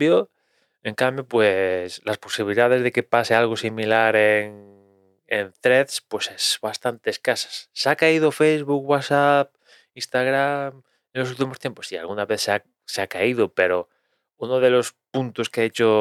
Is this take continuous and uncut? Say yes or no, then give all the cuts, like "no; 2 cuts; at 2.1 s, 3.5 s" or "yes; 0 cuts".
yes; 0 cuts